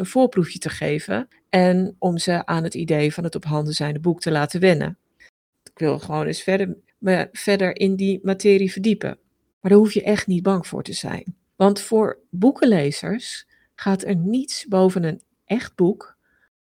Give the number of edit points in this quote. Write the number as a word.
two